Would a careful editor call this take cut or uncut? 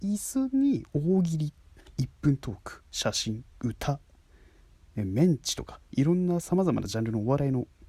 uncut